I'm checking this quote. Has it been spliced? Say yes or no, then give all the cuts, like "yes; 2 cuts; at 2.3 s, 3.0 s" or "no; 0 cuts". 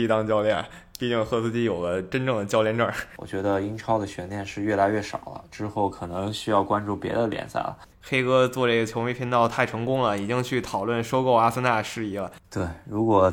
yes; 2 cuts; at 3.2 s, 7.9 s